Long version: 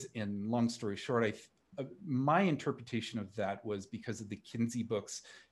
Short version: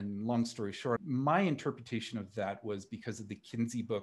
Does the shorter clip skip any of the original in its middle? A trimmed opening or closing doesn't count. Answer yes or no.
yes